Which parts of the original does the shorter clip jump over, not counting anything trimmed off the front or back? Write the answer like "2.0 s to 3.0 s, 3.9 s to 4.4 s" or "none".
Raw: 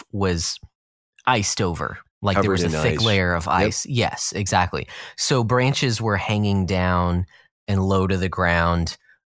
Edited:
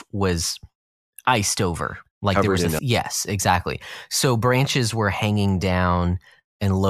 2.8 s to 3.9 s